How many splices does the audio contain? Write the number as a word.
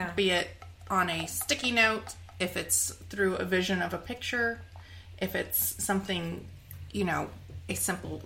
zero